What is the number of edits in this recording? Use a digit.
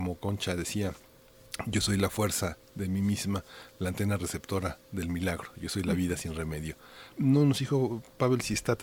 1